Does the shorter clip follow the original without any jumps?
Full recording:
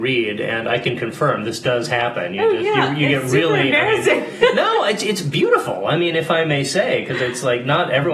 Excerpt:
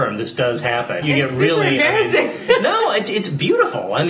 no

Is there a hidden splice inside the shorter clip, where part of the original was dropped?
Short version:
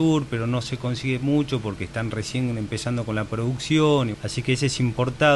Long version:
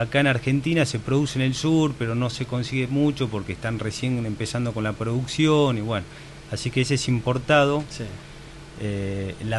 yes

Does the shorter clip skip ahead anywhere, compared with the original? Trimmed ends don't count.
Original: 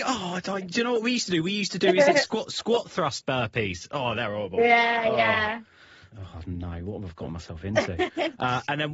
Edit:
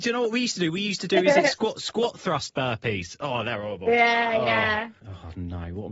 yes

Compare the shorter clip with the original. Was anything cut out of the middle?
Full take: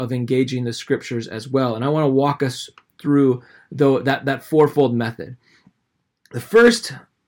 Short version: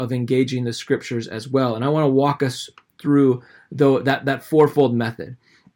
no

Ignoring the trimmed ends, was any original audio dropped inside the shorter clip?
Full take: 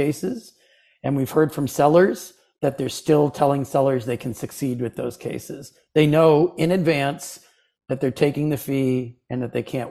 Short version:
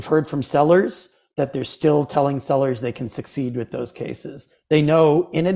no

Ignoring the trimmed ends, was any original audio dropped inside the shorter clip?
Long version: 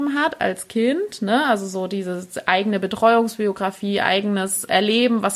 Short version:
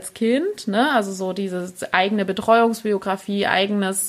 no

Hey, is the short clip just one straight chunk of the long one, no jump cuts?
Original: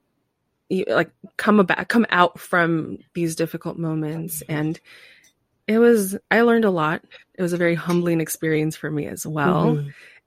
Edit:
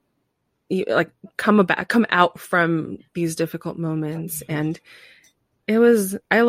yes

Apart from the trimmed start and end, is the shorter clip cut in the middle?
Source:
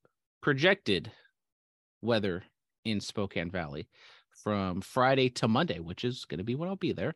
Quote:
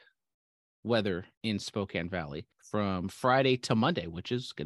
yes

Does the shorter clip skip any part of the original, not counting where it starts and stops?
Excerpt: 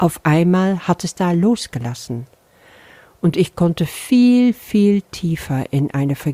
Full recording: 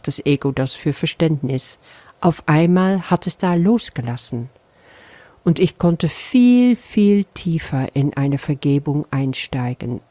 no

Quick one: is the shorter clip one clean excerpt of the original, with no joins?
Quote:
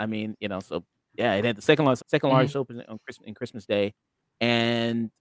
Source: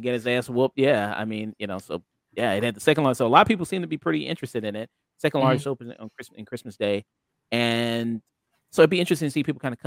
no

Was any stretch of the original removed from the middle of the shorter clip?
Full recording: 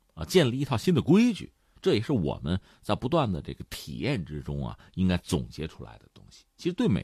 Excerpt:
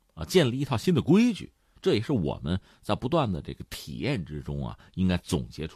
no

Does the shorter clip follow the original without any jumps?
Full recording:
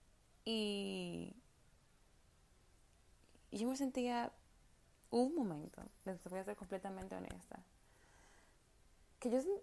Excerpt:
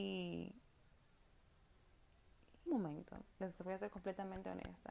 no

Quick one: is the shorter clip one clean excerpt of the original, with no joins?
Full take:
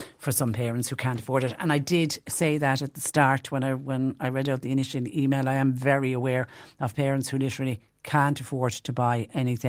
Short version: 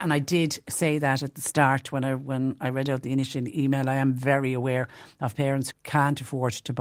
no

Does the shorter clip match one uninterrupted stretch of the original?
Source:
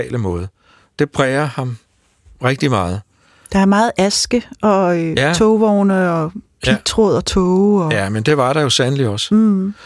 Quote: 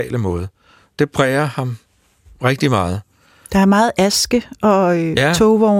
yes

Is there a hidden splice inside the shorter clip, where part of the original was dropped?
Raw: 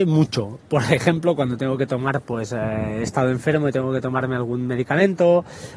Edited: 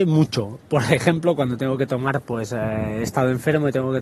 no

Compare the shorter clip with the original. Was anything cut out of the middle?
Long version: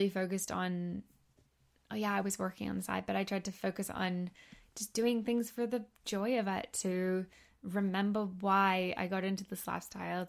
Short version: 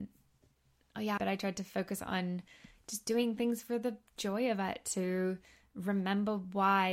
yes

